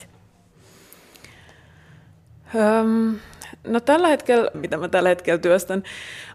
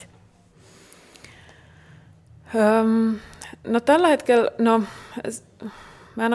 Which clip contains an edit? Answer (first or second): first